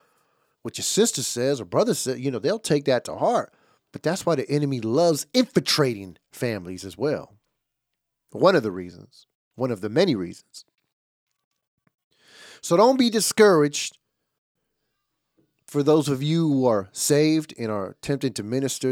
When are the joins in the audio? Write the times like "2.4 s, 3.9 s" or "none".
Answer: none